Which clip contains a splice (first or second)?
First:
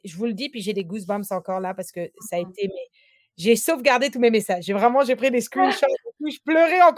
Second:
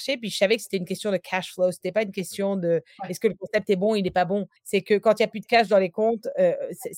second